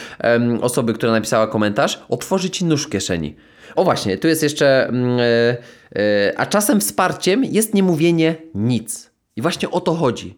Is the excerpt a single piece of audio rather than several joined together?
no; 1 cut; at 3.8 s

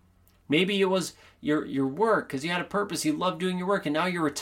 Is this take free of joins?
yes; 0 cuts

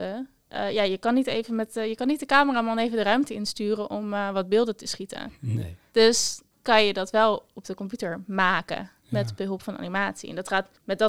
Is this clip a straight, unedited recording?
yes; 0 cuts

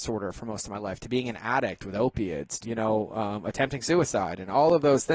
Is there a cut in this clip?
yes; 1 cut; at 2.6 s

